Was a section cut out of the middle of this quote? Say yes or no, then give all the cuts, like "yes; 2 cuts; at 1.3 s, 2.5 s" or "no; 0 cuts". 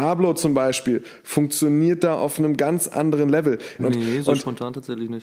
yes; 1 cut; at 3.8 s